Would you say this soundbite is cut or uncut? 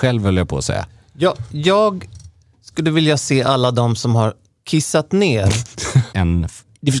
cut